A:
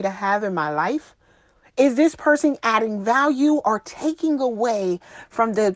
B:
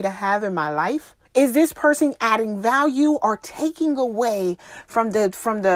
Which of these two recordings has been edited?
B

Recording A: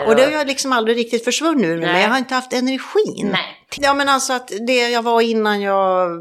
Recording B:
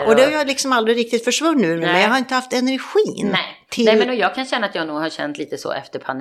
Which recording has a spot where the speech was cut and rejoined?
A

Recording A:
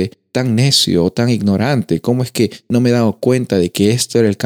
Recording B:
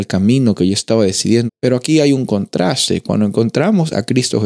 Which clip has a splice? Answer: B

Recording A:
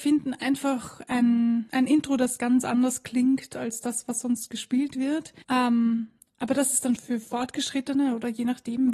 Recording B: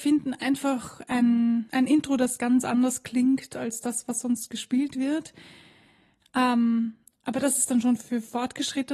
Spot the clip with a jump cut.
A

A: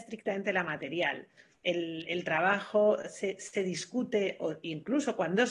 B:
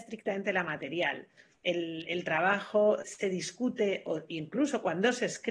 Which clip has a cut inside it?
B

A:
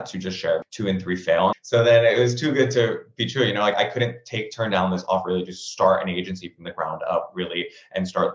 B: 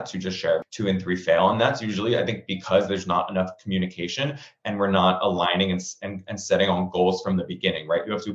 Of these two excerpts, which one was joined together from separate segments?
A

